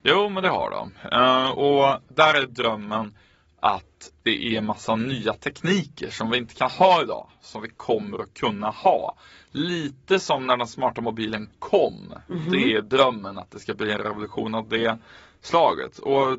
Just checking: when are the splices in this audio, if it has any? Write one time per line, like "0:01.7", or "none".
none